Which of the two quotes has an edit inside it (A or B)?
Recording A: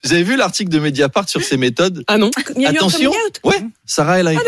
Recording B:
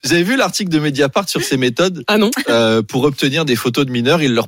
A